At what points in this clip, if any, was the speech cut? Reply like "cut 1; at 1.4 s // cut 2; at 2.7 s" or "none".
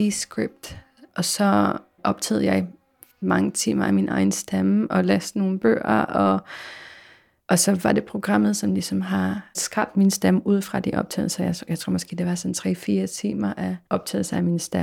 none